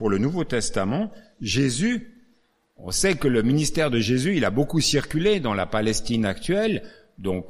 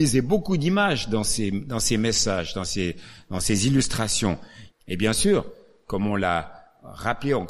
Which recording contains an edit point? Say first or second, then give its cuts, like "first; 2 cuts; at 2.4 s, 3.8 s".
second; 1 cut; at 4.7 s